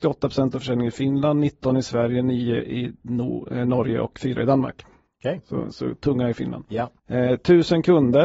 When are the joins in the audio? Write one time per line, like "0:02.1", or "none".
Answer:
0:07.0